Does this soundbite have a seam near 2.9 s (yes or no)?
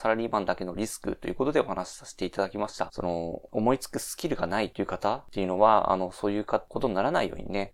yes